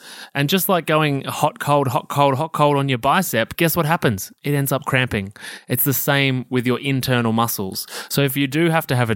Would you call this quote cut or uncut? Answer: uncut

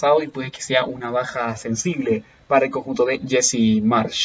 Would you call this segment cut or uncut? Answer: uncut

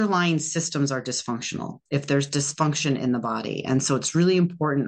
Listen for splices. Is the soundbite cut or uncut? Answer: uncut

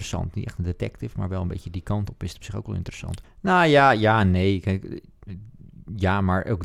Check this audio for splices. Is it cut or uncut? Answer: cut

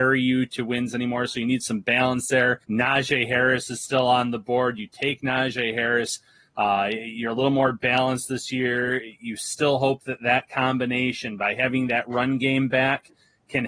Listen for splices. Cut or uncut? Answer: cut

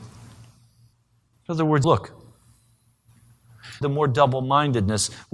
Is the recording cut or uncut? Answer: cut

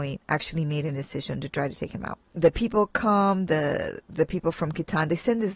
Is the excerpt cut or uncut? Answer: uncut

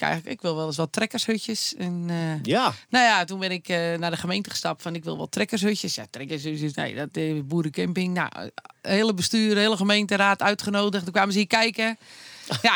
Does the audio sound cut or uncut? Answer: uncut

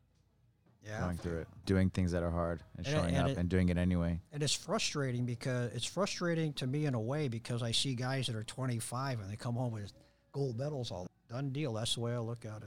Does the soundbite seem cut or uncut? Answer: cut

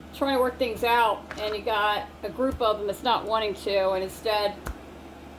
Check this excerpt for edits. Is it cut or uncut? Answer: uncut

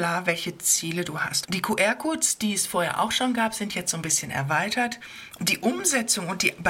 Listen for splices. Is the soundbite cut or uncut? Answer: cut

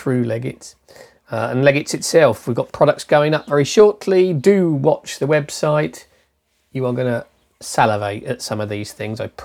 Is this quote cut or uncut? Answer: uncut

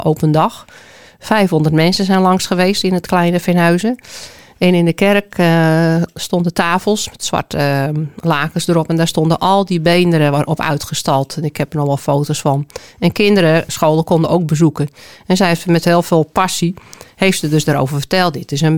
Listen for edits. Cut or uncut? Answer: cut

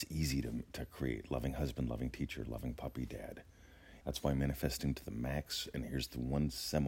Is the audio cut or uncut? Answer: cut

